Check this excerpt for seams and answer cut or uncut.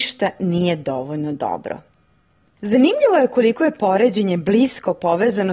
cut